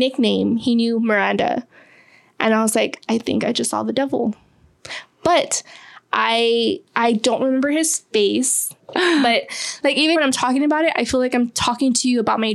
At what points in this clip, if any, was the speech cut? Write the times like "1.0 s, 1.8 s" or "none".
6.9 s, 8.8 s, 10.2 s